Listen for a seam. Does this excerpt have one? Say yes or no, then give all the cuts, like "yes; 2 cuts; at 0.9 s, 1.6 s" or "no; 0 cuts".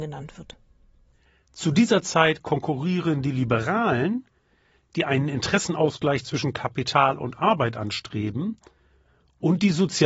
no; 0 cuts